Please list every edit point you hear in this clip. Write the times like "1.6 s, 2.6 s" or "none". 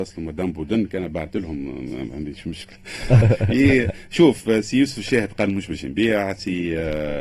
3.2 s